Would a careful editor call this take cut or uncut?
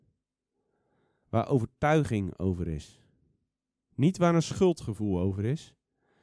uncut